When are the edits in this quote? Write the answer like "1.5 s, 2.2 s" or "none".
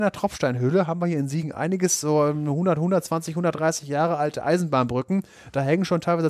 none